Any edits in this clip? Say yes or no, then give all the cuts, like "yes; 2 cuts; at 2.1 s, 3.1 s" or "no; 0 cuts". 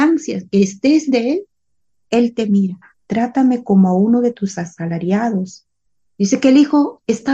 yes; 2 cuts; at 2.9 s, 6.1 s